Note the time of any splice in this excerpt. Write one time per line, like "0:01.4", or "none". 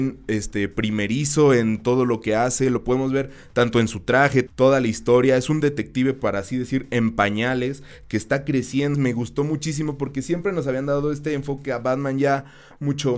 0:04.5
0:08.9